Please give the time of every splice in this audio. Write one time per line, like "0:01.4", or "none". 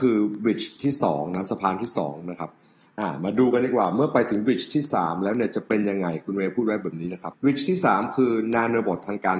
0:07.3